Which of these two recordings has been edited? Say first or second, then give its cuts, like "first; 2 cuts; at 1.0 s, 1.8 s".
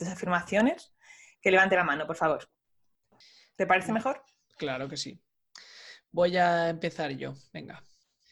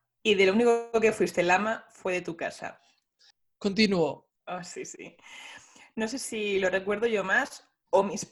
second; 1 cut; at 4.4 s